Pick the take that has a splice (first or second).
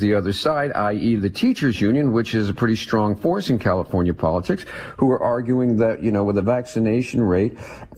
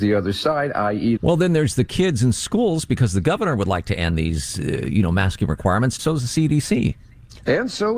second